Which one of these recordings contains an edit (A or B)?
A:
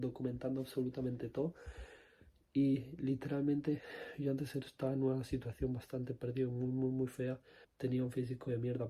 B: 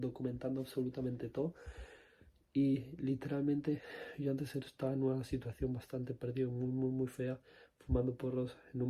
A